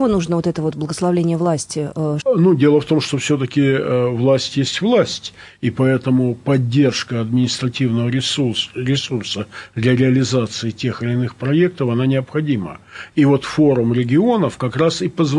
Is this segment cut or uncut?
cut